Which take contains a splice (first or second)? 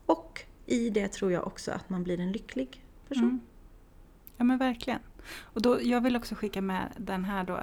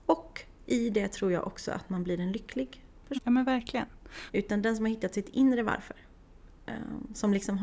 second